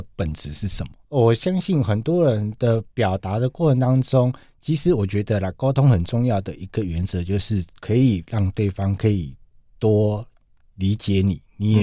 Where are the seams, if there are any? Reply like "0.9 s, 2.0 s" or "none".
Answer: 1.0 s